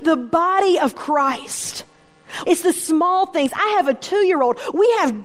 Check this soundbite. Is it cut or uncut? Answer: cut